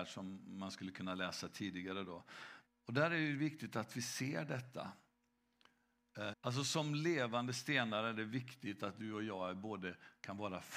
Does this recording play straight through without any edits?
no; 2 cuts; at 2.7 s, 6.3 s

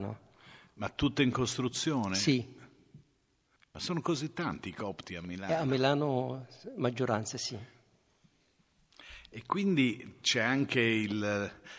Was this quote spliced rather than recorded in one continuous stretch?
yes; 1 cut; at 3.6 s

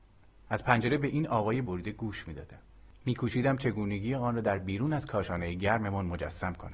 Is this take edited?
yes; 1 cut; at 1.6 s

